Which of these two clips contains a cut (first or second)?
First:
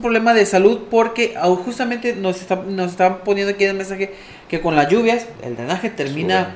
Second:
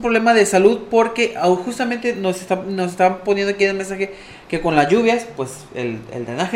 first